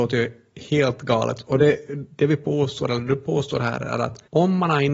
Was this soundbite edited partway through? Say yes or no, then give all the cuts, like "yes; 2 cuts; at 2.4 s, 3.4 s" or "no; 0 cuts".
no; 0 cuts